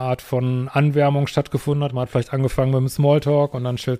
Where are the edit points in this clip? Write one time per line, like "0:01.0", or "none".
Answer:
none